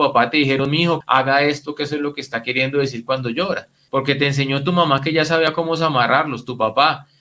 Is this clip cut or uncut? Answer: cut